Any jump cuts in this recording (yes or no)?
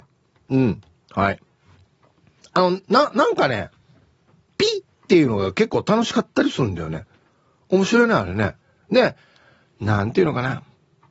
no